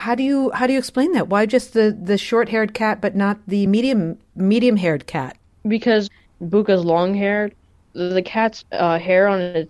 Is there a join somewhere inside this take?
no; 0 cuts

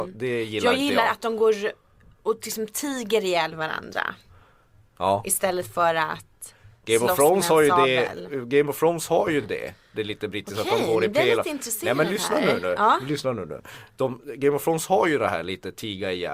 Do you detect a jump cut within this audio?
no; 0 cuts

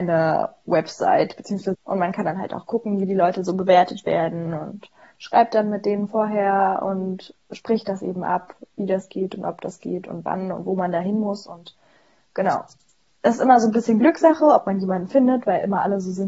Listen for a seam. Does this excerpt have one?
yes; 1 cut; at 1.7 s

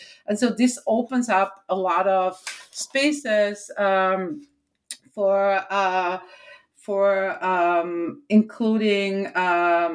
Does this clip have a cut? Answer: no; 0 cuts

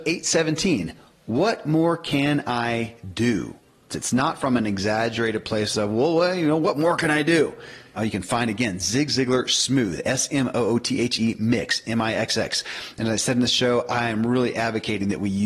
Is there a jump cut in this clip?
yes; 2 cuts; at 3.9 s, 8.0 s

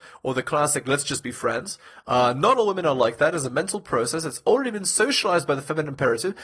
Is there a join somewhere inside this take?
no; 0 cuts

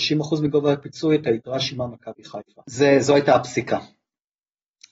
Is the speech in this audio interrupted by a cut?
no; 0 cuts

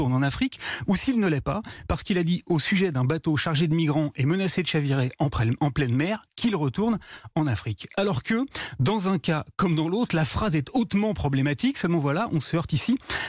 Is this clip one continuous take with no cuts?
yes; 0 cuts

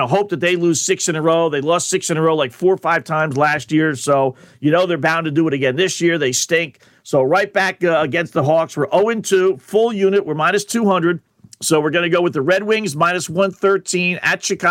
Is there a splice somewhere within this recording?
no; 0 cuts

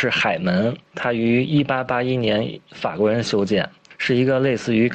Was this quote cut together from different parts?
no; 0 cuts

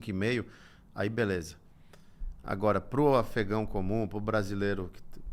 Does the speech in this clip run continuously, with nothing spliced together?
yes; 0 cuts

